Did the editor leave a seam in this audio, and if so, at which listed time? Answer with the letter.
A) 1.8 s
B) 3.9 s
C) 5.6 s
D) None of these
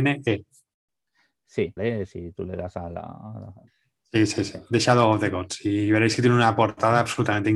A